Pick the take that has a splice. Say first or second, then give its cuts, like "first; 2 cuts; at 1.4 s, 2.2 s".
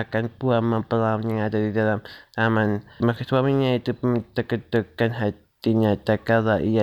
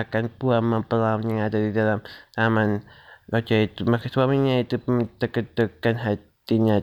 first; 1 cut; at 3.0 s